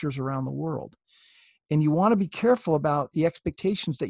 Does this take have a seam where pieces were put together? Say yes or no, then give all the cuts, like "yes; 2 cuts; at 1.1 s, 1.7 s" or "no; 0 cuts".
no; 0 cuts